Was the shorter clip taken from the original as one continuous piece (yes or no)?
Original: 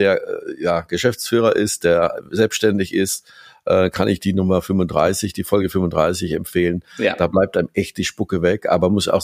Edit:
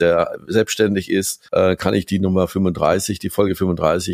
no